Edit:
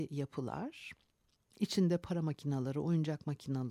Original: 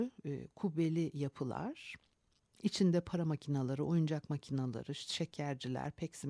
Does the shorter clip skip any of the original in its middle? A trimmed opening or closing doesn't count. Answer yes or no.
no